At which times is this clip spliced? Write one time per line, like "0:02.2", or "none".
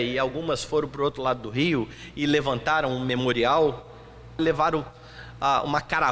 0:04.4